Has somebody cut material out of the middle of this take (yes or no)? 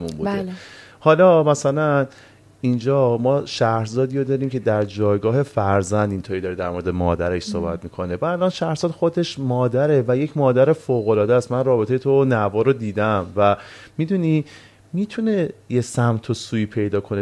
no